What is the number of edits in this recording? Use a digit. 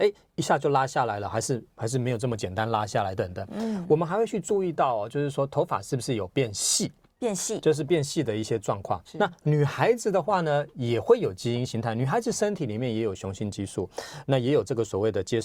2